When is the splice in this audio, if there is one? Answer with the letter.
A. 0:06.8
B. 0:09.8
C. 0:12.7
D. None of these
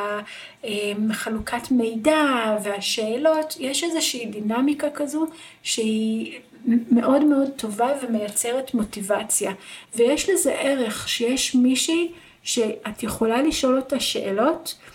B